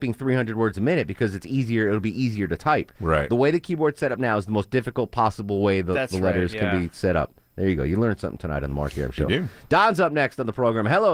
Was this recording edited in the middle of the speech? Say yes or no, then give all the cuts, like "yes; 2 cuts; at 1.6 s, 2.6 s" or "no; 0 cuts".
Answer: no; 0 cuts